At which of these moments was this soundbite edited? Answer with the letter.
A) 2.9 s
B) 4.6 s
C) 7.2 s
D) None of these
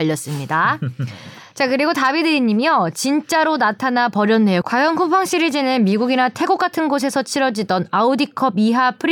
B